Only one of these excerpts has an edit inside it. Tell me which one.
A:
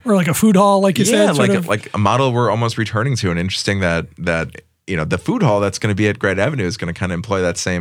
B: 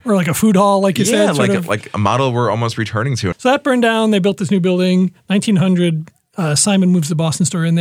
B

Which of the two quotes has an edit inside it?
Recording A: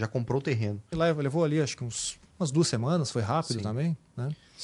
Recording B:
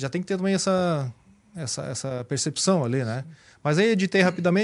A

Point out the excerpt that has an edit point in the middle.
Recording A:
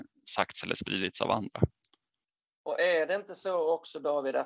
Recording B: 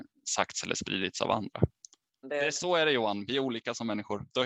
B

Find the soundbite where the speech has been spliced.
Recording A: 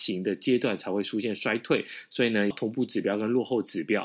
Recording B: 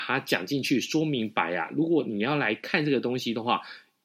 A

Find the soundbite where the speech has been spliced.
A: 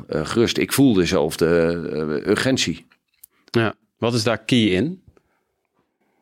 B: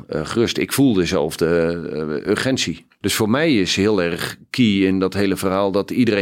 B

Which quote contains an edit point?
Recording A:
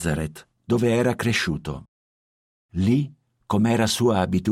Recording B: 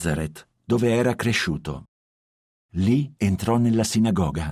B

